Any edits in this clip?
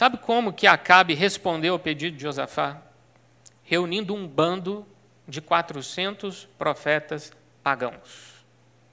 no; 0 cuts

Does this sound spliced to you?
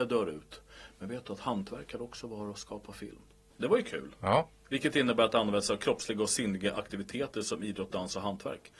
yes; 1 cut; at 3.5 s

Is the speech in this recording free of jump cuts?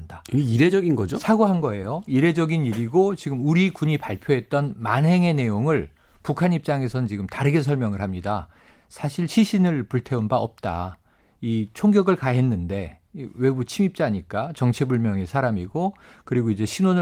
yes; 0 cuts

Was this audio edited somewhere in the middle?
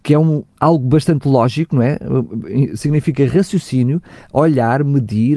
no; 0 cuts

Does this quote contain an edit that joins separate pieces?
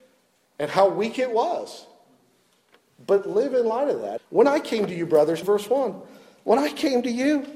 yes; 2 cuts; at 4.2 s, 5.4 s

